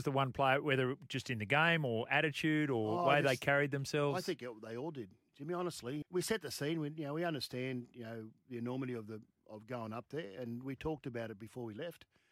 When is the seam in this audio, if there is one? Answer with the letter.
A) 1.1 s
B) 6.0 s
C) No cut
B